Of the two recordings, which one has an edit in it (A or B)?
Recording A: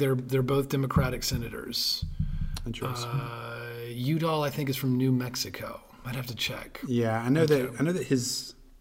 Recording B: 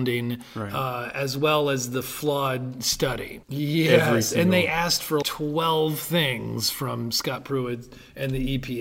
B